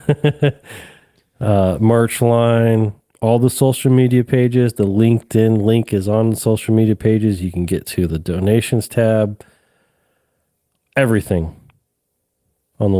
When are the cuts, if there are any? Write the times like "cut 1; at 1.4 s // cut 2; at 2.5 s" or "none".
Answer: none